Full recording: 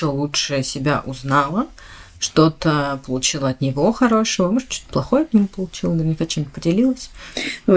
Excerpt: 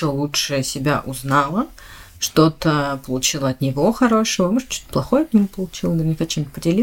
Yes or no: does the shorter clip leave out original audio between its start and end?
no